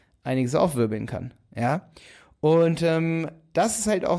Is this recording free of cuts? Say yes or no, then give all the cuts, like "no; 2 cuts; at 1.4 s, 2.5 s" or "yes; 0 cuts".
yes; 0 cuts